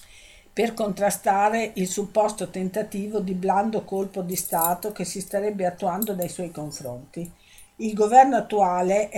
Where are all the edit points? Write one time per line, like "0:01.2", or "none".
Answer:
0:07.7